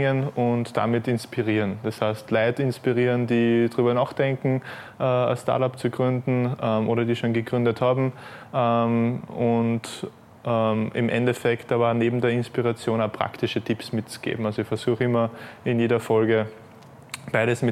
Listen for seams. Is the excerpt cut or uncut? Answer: uncut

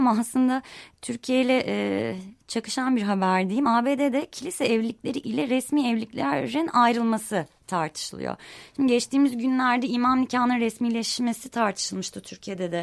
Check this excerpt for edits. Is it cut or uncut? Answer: uncut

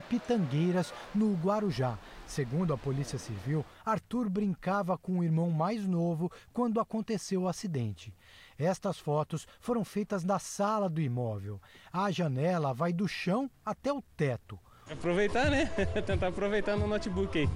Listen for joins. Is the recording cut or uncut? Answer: cut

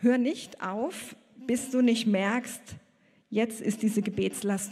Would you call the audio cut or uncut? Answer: uncut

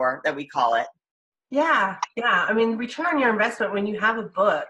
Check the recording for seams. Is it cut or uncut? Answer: uncut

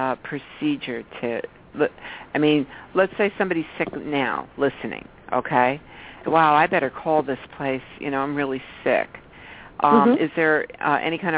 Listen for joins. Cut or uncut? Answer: cut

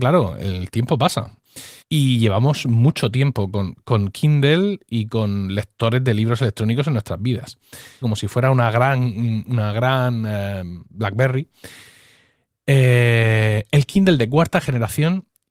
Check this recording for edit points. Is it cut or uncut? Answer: cut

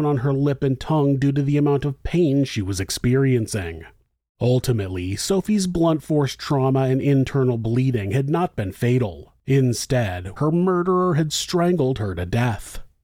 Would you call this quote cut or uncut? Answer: cut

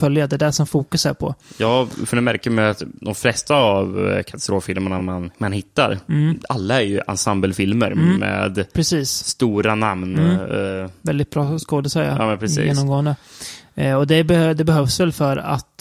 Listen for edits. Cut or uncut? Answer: uncut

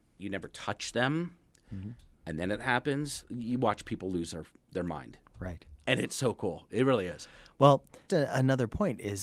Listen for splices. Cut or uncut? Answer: cut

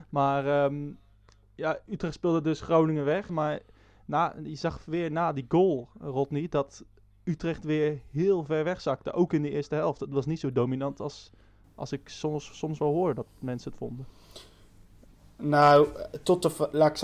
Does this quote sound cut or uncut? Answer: cut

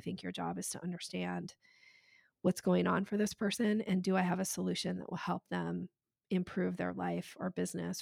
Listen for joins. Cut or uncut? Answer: uncut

